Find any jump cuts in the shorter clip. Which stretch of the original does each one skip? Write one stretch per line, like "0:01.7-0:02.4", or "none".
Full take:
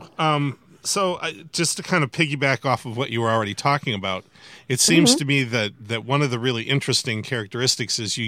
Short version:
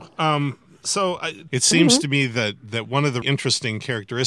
0:01.5-0:04.6
0:06.4-0:06.6